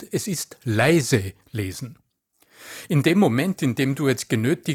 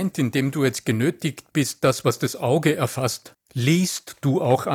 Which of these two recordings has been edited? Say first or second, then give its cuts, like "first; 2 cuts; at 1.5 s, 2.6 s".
second; 1 cut; at 3.3 s